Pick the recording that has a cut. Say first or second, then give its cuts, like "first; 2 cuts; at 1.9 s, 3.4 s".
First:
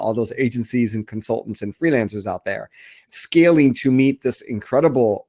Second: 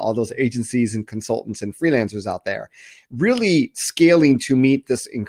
first; 1 cut; at 3.1 s